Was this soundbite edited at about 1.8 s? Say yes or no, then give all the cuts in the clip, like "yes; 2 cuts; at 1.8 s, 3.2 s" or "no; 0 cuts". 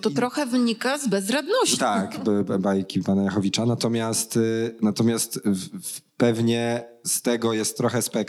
yes; 1 cut; at 1.8 s